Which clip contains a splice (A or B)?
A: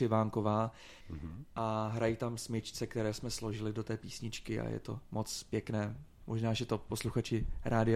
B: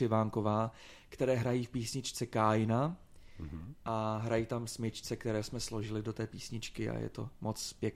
A